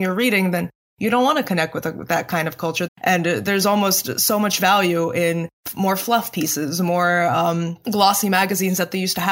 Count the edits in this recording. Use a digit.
1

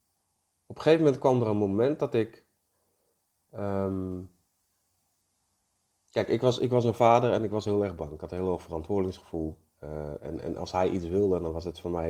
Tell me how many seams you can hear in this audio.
0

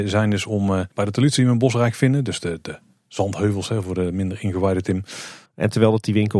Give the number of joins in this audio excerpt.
1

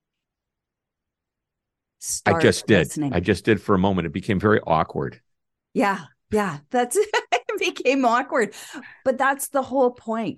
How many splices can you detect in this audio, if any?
0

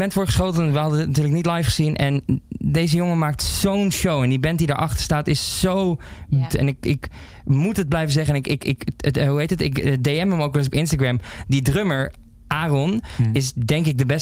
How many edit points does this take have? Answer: 1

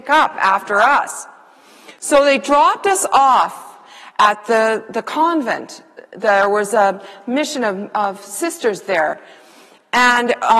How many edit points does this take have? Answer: 0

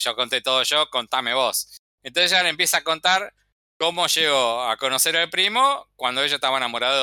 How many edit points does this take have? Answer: 1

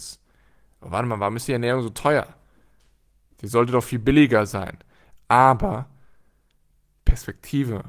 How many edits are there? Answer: 1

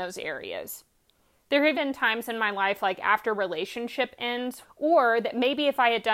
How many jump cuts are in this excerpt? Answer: 2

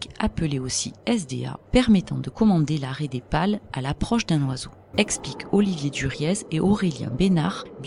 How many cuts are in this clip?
2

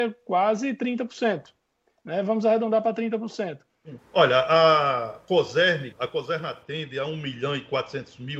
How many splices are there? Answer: 2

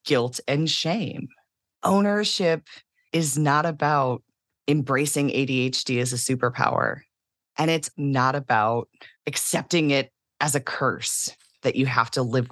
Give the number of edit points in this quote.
3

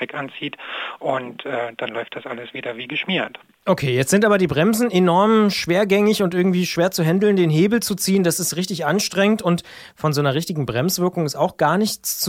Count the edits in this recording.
0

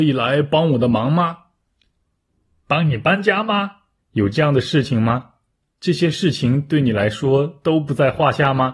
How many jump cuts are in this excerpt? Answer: 2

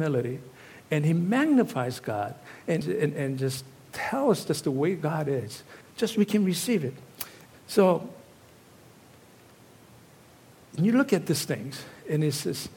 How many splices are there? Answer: 3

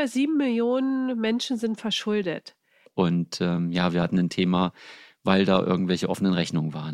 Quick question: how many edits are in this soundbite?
1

